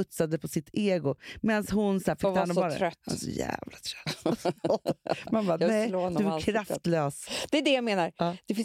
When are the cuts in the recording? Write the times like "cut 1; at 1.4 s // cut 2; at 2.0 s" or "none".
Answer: none

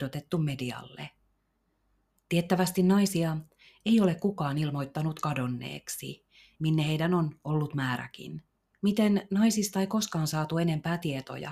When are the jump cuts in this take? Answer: cut 1; at 6.5 s // cut 2; at 8.7 s

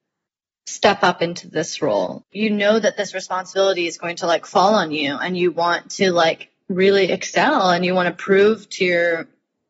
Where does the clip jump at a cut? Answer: cut 1; at 2.2 s

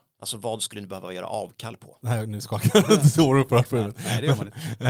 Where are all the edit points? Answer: cut 1; at 2.0 s

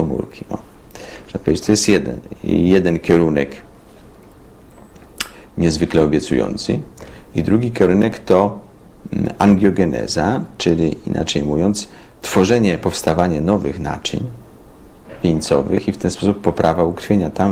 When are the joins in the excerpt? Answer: none

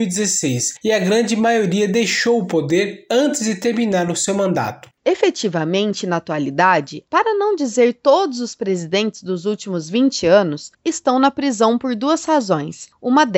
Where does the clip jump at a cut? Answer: cut 1; at 4.9 s // cut 2; at 7.1 s // cut 3; at 10.8 s

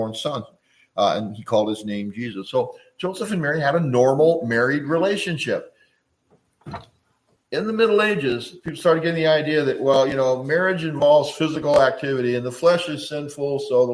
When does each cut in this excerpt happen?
none

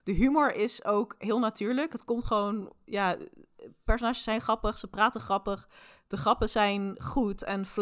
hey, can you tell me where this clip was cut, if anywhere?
none

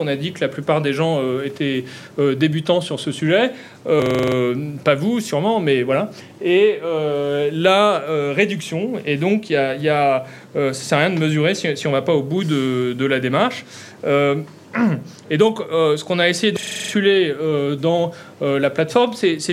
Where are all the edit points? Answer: none

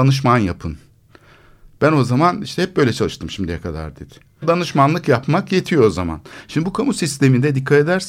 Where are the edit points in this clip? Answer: cut 1; at 4.4 s

